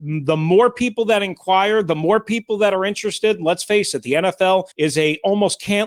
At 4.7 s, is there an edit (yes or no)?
yes